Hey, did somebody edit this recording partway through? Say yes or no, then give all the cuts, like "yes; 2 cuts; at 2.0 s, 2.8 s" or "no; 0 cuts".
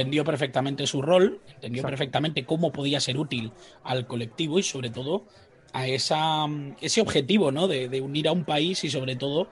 no; 0 cuts